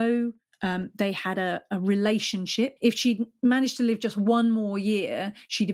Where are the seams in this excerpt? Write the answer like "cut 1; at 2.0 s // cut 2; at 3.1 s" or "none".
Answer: cut 1; at 2.8 s